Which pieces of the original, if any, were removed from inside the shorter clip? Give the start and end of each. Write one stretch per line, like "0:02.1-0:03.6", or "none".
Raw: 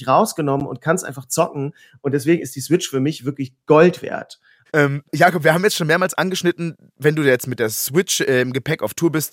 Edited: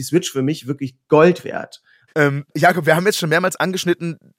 none